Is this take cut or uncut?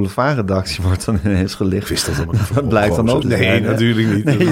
cut